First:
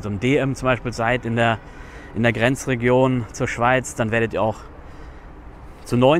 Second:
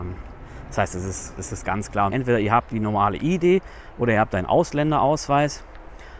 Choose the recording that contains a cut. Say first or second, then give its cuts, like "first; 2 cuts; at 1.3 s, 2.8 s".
second; 1 cut; at 2.1 s